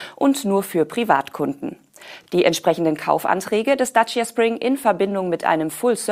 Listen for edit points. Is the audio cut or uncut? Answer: uncut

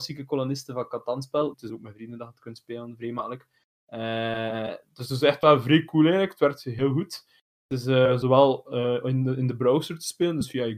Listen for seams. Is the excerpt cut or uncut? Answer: cut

